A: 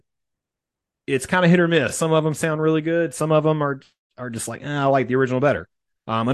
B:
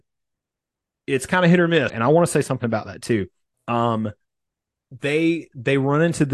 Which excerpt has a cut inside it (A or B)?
B